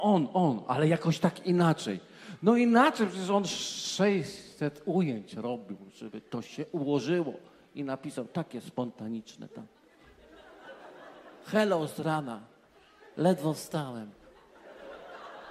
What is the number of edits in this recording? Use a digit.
0